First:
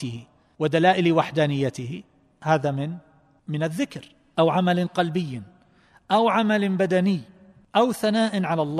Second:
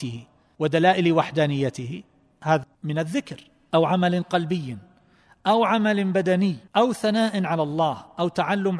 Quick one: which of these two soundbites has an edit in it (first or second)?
second